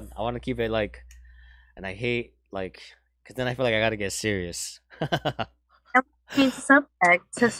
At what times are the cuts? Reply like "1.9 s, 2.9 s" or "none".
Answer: none